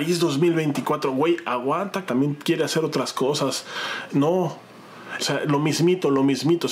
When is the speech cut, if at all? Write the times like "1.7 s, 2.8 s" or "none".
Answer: 2.1 s, 4.1 s, 5.2 s